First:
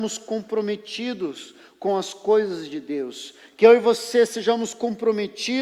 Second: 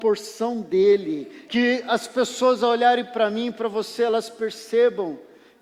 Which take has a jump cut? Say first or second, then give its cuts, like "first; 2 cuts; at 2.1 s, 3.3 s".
second; 1 cut; at 1.5 s